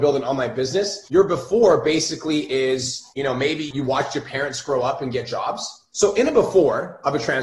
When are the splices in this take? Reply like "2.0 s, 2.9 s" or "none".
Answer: 5.9 s